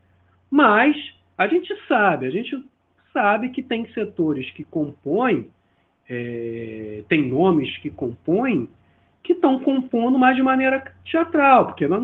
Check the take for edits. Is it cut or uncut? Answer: uncut